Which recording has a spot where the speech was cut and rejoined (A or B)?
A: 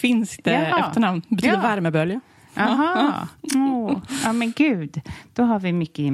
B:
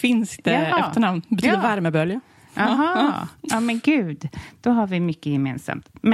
B